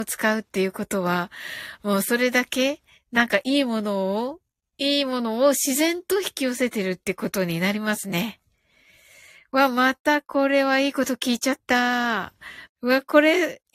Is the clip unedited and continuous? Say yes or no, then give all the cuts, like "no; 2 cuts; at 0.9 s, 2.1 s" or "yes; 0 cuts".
no; 1 cut; at 12.7 s